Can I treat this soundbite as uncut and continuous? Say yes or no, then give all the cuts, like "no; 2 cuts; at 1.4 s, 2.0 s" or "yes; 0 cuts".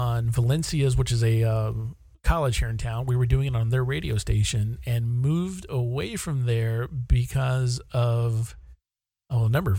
yes; 0 cuts